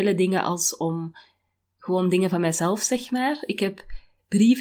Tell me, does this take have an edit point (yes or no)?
no